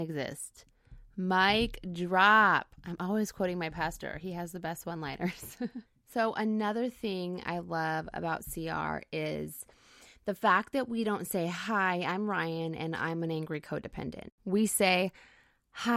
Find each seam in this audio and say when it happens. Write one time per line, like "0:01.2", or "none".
none